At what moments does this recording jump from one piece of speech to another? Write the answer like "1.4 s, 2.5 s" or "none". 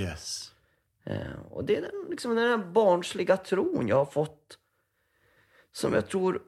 none